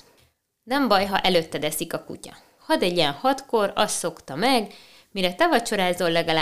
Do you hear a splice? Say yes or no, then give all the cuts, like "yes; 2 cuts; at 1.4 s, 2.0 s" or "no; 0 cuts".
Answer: yes; 1 cut; at 2.6 s